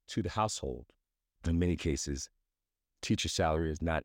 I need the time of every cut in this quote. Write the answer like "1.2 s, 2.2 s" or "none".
1.4 s